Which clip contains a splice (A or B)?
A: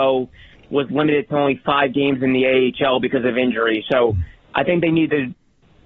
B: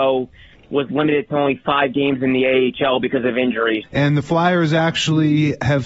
B